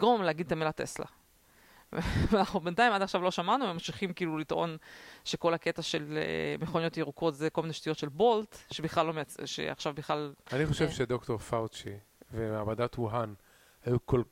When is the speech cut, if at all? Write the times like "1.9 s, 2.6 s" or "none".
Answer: 10.5 s